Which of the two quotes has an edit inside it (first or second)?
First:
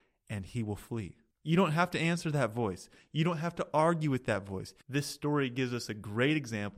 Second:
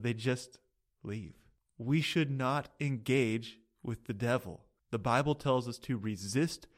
first